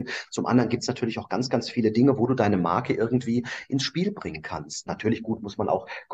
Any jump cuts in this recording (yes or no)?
no